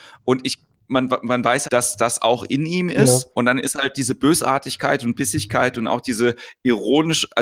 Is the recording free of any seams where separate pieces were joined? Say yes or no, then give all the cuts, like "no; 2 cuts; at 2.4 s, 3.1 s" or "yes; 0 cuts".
no; 2 cuts; at 1.6 s, 3.3 s